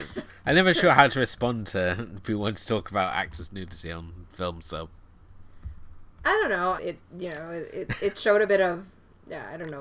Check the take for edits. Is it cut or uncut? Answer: cut